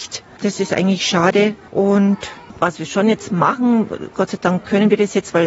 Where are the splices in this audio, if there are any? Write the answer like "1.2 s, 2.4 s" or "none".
none